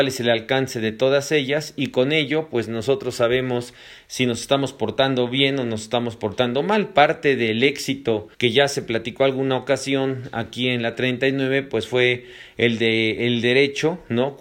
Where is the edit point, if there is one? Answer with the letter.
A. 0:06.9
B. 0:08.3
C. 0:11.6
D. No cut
B